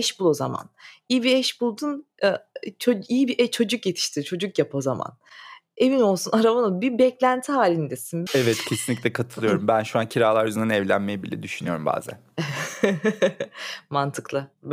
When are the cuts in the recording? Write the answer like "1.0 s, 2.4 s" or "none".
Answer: 8.3 s